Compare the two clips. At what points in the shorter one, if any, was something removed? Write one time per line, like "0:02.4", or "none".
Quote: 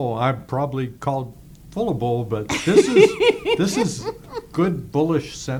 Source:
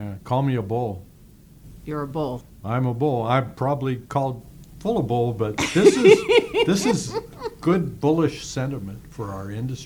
none